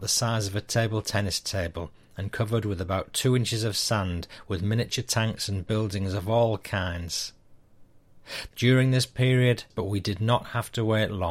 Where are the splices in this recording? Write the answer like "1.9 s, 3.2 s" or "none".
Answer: 8.5 s, 9.7 s